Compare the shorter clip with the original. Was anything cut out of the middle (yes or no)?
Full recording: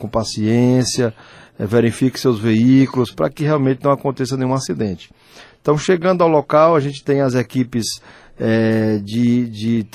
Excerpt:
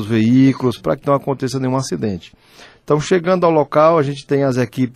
yes